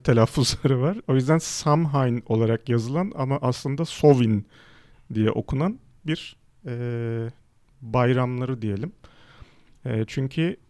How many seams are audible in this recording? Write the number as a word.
one